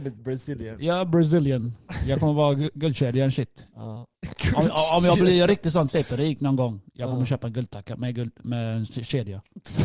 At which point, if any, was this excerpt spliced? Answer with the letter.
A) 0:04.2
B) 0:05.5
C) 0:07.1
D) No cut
A